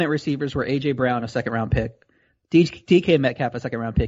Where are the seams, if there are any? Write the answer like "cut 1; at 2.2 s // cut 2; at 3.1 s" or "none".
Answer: none

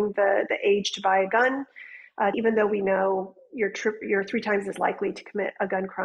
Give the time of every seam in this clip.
cut 1; at 2.3 s // cut 2; at 4.0 s

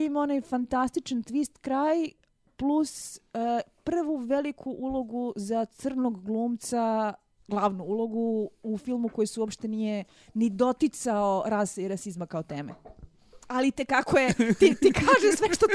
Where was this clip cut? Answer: none

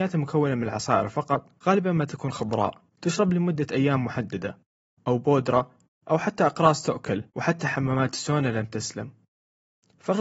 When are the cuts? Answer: cut 1; at 1.6 s // cut 2; at 2.9 s // cut 3; at 7.3 s

